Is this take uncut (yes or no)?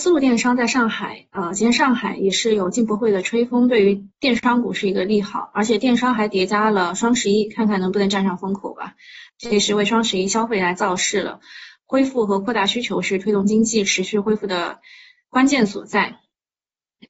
no